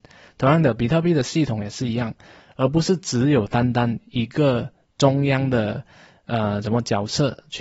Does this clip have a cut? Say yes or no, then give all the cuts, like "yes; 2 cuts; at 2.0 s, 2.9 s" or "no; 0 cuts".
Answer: yes; 1 cut; at 2.4 s